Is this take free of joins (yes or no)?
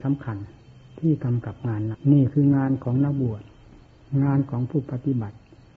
no